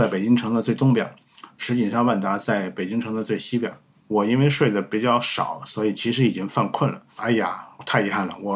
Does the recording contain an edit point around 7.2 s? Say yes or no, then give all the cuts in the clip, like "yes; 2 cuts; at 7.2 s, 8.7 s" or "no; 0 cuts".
yes; 2 cuts; at 4.1 s, 7.2 s